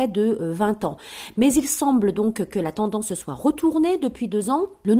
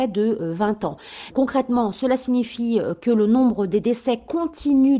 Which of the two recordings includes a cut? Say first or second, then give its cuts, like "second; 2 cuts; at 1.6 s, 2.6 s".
second; 1 cut; at 1.3 s